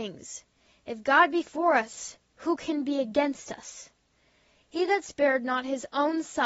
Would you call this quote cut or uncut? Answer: uncut